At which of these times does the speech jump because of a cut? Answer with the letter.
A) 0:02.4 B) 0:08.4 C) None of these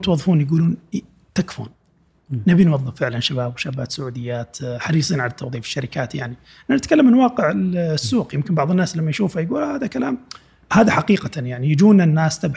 C